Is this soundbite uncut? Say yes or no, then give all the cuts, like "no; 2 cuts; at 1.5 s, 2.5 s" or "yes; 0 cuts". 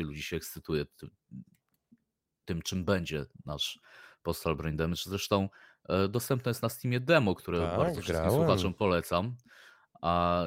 yes; 0 cuts